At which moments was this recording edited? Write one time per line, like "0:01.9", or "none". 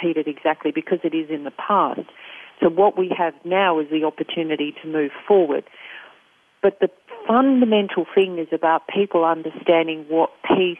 none